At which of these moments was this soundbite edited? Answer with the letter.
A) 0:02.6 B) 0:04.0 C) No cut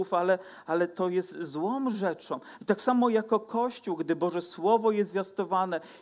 A